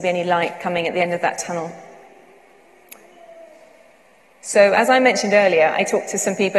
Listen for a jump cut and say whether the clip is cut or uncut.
uncut